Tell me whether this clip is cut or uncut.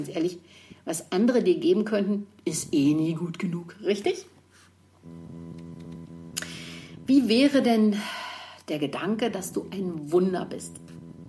uncut